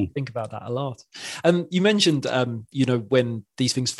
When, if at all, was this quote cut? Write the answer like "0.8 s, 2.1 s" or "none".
none

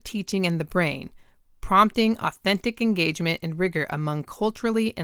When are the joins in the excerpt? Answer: none

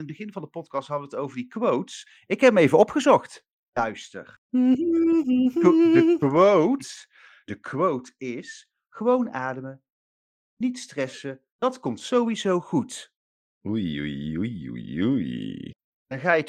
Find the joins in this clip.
none

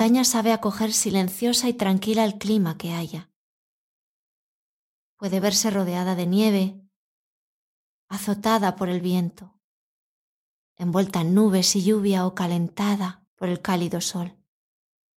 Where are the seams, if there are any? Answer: 7.9 s, 13.3 s

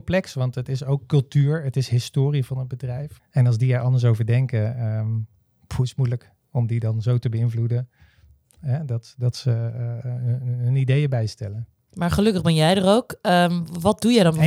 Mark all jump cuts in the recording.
3.2 s

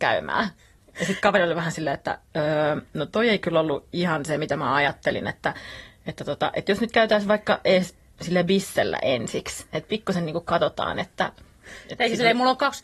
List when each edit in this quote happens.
none

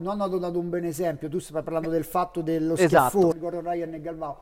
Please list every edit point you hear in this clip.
3.3 s

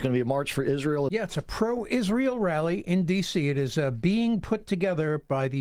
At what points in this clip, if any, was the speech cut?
1.1 s

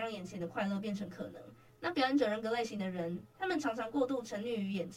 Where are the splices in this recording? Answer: 1.7 s, 3.3 s

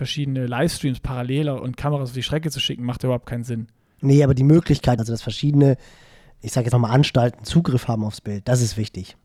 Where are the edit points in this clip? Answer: 5.0 s, 6.7 s

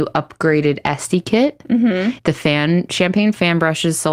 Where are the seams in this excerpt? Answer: 2.2 s

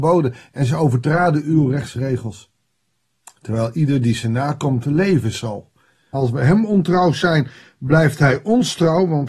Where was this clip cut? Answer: 6.1 s

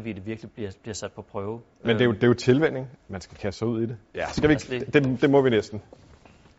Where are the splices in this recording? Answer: 3.0 s, 4.1 s

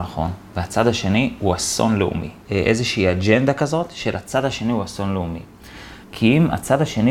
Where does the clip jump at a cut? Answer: 2.4 s, 6.0 s

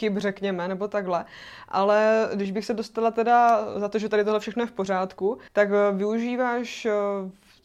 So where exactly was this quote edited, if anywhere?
5.5 s

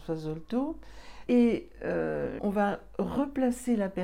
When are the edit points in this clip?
1.3 s, 2.4 s

